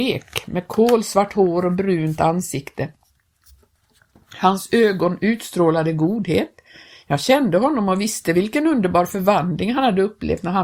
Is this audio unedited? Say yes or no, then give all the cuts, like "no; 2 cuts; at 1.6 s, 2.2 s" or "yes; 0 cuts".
yes; 0 cuts